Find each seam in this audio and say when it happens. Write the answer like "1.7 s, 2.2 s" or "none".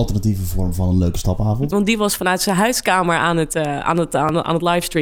1.7 s